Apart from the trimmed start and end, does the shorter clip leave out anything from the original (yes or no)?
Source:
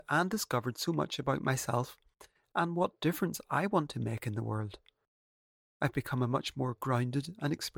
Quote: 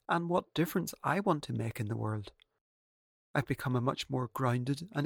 no